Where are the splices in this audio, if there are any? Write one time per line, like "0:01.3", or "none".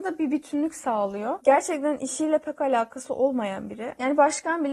0:01.4